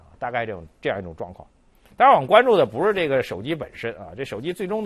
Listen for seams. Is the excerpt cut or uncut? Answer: uncut